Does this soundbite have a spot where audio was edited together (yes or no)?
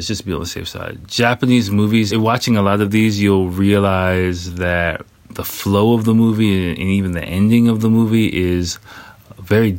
yes